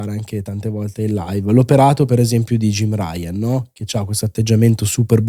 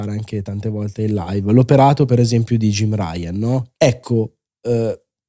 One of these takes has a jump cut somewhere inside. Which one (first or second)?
second